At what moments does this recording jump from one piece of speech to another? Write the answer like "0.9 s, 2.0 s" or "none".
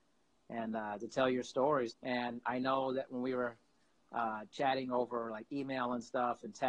1.9 s